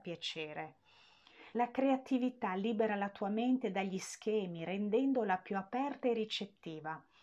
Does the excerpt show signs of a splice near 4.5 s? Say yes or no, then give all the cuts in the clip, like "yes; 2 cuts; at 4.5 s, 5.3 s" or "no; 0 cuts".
no; 1 cut; at 1.5 s